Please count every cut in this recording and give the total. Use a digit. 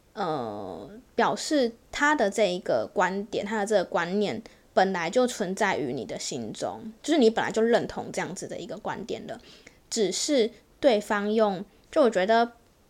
1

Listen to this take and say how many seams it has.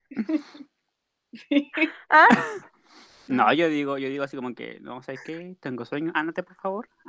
0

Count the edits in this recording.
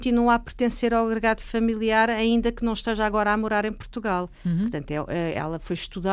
0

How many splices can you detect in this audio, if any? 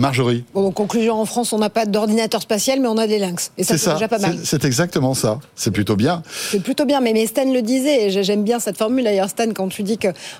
0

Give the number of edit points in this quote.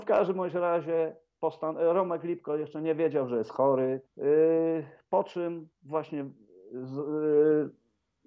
2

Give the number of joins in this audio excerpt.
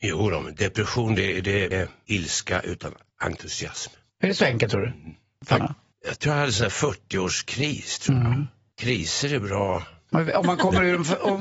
2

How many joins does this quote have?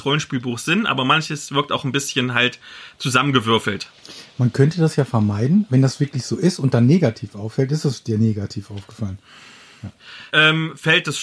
1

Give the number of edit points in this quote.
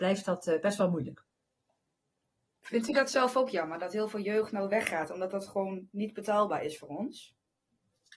0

